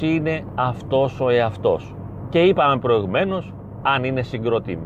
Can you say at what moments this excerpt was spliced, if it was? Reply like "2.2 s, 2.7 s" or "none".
none